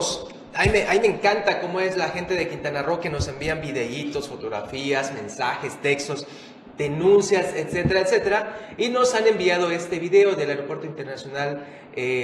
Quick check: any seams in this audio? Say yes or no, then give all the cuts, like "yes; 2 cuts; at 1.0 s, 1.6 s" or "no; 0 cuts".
no; 0 cuts